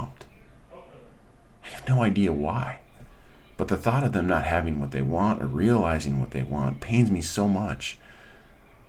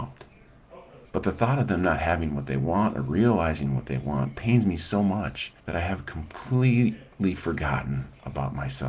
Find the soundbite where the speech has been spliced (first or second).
second